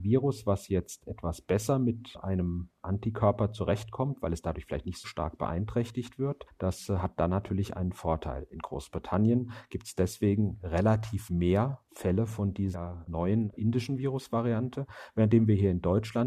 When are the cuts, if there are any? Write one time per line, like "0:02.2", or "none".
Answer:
0:05.0

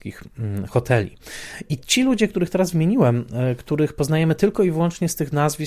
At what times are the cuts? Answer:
none

